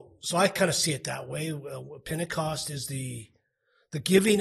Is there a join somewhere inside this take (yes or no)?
no